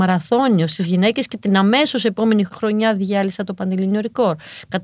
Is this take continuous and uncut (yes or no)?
no